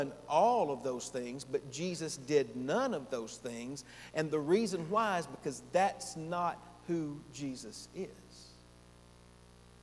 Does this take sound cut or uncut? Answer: uncut